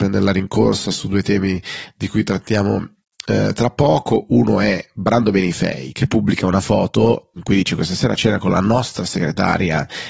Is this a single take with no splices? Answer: no; 1 cut; at 5.9 s

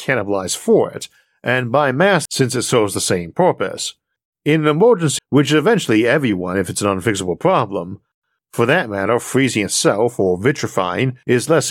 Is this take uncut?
no; 2 cuts; at 2.3 s, 5.2 s

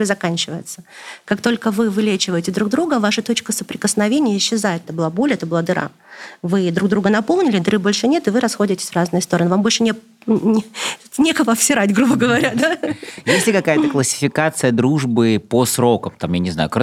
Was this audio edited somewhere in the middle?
yes; 1 cut; at 4.8 s

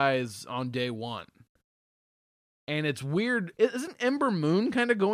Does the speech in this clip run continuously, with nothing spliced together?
no; 1 cut; at 3.5 s

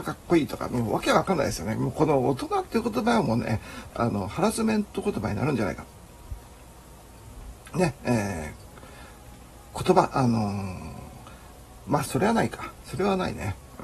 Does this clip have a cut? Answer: yes; 2 cuts; at 3.9 s, 12.1 s

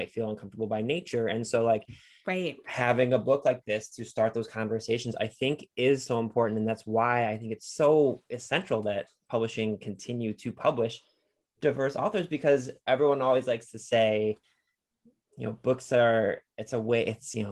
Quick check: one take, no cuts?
yes; 0 cuts

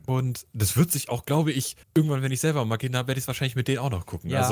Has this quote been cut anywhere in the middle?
yes; 1 cut; at 1.8 s

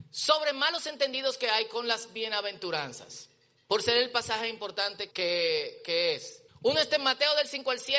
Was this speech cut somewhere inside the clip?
yes; 2 cuts; at 5.1 s, 6.5 s

